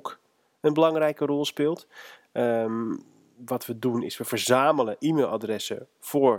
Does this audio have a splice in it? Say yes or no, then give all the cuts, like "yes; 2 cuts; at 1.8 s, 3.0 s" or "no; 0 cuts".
no; 0 cuts